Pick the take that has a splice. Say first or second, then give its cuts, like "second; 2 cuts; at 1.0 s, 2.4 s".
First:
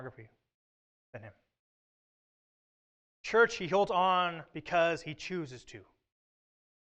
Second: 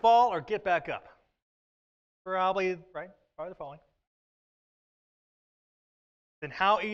second; 1 cut; at 2.9 s